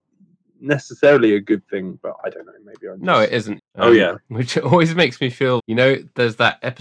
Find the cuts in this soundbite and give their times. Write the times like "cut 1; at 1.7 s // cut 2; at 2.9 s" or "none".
cut 1; at 3.6 s // cut 2; at 5.6 s